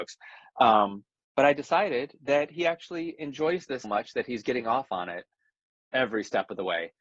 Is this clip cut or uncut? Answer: cut